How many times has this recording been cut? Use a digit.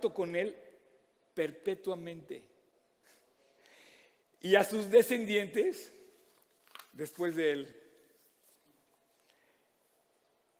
0